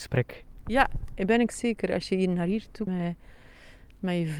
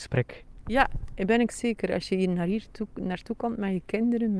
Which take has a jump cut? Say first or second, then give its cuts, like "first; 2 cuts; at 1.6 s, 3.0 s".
first; 1 cut; at 2.9 s